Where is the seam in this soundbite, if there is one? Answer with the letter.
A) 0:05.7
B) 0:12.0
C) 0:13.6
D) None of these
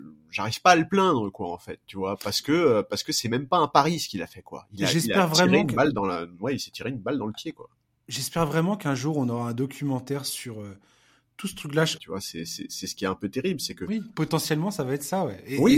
B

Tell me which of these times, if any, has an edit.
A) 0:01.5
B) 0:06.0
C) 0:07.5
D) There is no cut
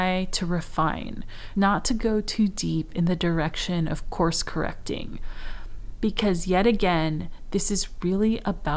A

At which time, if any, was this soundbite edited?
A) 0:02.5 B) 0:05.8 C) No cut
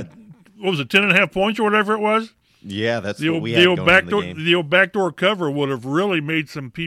C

